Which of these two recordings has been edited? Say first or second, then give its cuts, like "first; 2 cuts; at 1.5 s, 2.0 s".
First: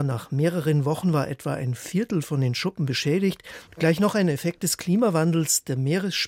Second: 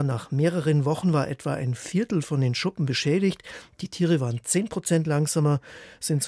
first; 1 cut; at 3.7 s